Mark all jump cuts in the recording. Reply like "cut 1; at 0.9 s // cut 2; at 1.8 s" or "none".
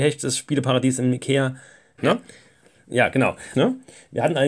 cut 1; at 2.0 s // cut 2; at 3.5 s